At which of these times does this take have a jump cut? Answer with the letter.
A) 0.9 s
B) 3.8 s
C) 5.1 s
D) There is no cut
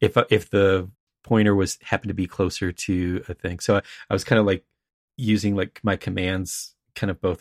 D